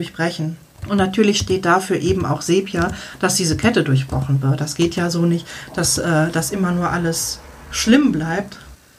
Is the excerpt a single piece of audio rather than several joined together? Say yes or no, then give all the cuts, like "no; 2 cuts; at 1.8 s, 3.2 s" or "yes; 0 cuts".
yes; 0 cuts